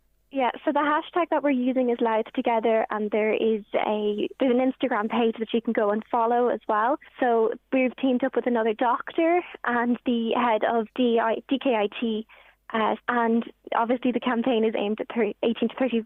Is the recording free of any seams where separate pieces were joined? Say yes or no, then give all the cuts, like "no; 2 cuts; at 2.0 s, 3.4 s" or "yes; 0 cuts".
no; 3 cuts; at 7.1 s, 10.9 s, 13.0 s